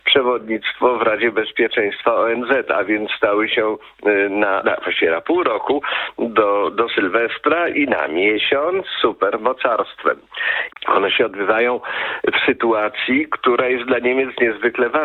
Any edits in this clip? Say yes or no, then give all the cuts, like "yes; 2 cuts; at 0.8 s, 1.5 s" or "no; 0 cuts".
yes; 2 cuts; at 4.6 s, 10.7 s